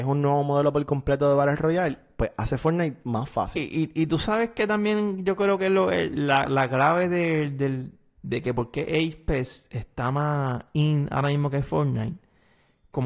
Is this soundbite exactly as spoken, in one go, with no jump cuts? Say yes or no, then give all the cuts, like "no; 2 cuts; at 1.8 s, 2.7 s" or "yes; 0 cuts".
yes; 0 cuts